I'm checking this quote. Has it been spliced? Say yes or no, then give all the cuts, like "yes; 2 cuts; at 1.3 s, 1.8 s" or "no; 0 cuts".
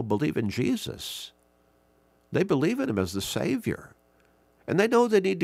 no; 0 cuts